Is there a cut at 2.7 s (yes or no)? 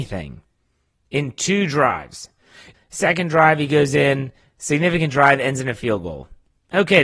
yes